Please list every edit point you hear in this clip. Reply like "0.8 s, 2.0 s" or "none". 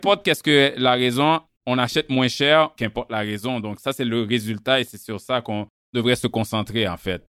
1.5 s, 2.8 s